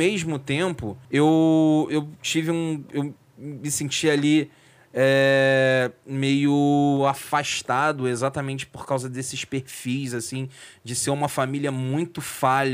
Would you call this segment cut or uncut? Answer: cut